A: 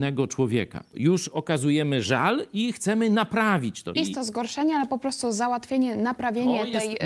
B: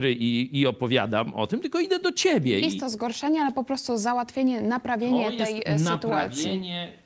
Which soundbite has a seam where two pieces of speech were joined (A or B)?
A